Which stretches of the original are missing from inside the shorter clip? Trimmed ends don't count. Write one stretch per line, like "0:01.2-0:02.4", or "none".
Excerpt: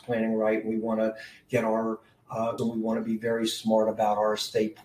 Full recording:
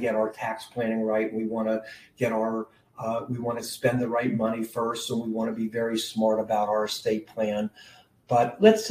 0:03.3-0:05.1